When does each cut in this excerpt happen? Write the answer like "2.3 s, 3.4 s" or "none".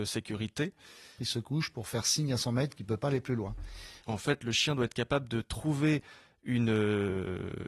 1.2 s, 4.0 s